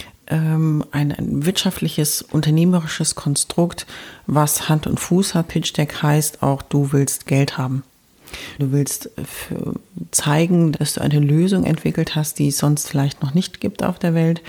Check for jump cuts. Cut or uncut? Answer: cut